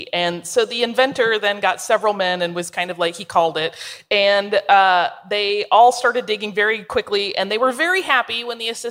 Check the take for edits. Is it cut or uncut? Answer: uncut